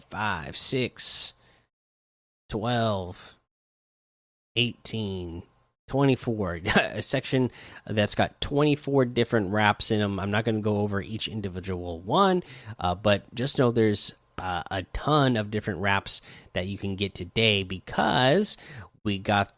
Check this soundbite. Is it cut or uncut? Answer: uncut